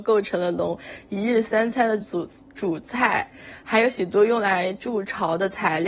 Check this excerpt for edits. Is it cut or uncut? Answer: uncut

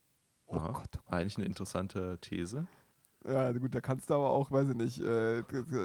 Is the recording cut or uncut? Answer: uncut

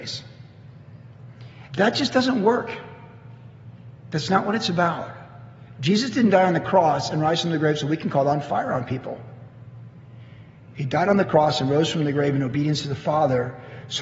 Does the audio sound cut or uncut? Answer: cut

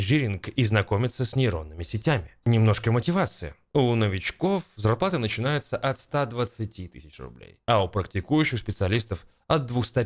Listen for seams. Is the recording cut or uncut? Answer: cut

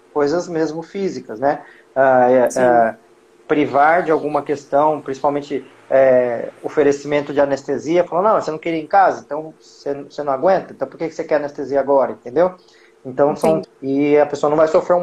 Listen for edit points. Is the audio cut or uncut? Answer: cut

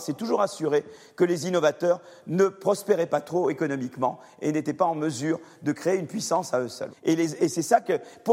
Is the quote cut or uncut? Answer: cut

